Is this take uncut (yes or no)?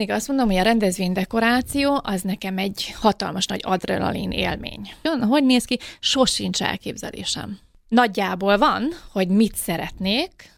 no